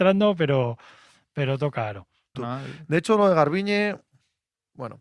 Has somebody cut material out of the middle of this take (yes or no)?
yes